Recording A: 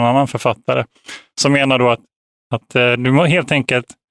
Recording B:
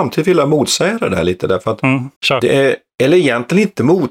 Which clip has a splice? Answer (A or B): B